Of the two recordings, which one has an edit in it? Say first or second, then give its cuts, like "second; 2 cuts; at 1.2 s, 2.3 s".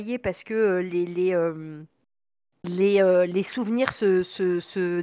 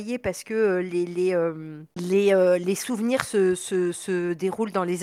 second; 1 cut; at 1.9 s